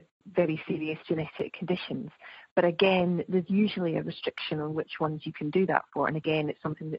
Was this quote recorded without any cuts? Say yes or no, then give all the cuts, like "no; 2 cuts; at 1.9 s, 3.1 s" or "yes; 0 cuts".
yes; 0 cuts